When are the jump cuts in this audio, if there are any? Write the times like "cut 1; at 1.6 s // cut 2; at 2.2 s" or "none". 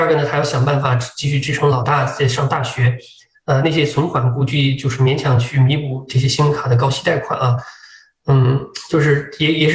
none